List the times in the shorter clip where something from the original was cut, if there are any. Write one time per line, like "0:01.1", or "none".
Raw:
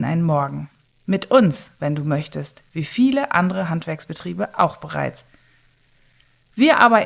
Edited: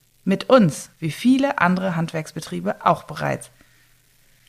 0:00.9